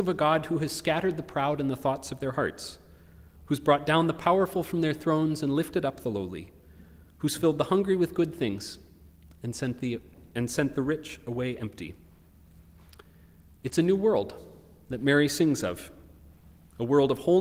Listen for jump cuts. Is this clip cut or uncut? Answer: uncut